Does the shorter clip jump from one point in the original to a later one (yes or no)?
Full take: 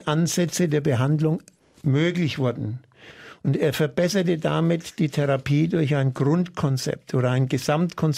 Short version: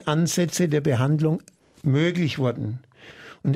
no